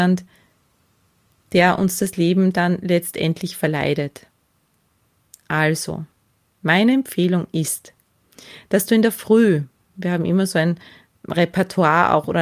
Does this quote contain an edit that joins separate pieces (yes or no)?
no